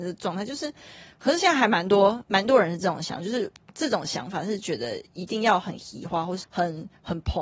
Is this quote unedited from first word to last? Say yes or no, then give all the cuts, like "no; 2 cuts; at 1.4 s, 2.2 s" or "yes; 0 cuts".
no; 1 cut; at 6.4 s